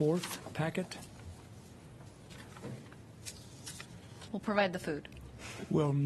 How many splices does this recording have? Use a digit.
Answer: 1